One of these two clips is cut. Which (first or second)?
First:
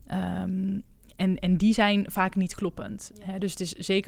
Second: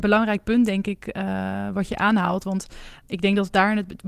second